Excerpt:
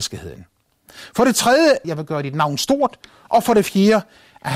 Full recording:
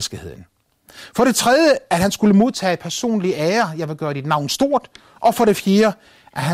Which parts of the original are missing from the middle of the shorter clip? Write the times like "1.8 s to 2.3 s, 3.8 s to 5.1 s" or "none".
1.8 s to 3.8 s